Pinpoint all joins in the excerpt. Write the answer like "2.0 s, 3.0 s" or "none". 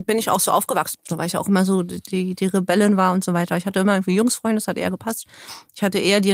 0.9 s

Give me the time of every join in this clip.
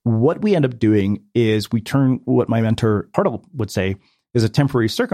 3.1 s

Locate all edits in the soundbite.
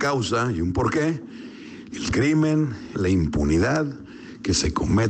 1.9 s, 2.9 s

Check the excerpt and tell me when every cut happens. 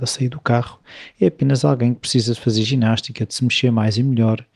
none

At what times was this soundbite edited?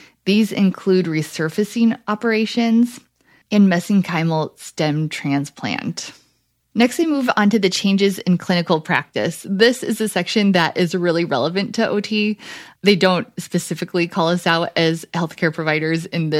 3.4 s

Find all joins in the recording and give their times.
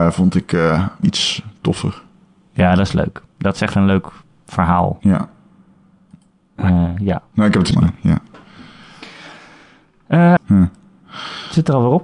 1.0 s, 7.7 s, 10.4 s

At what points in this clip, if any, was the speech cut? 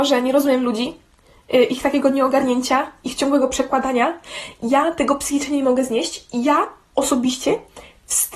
none

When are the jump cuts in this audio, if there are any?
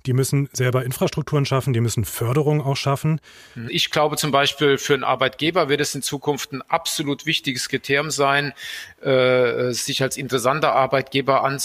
3.7 s

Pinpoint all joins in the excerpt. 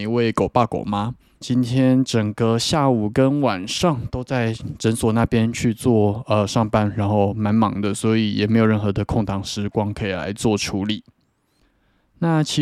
1.4 s

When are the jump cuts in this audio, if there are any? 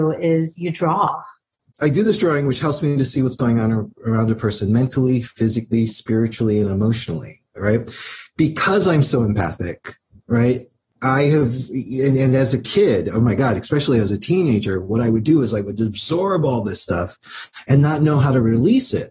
none

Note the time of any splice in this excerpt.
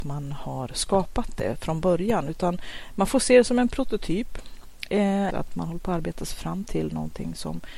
5.3 s

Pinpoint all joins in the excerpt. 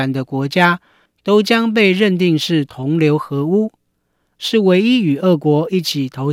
4.4 s

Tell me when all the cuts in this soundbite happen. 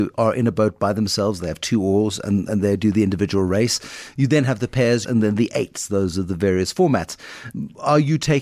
5.0 s

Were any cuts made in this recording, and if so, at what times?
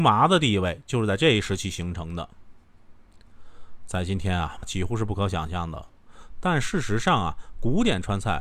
4.6 s

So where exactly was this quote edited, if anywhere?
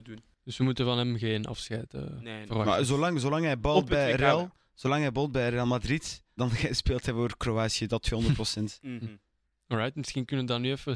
6.4 s

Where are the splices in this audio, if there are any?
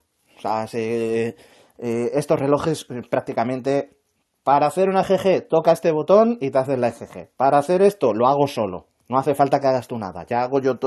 none

